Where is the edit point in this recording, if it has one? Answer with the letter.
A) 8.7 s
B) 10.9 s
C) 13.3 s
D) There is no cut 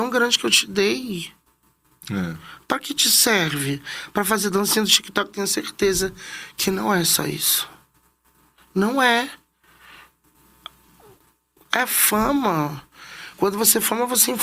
D